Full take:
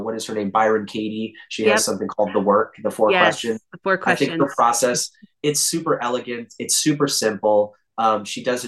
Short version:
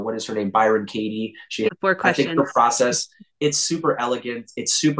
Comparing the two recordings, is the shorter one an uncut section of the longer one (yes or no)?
no